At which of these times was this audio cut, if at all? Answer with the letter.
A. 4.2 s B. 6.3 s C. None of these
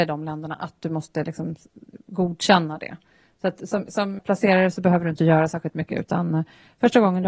A